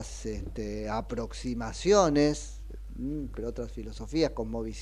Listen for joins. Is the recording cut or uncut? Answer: cut